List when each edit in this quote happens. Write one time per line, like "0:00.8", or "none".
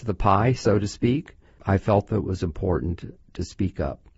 0:01.6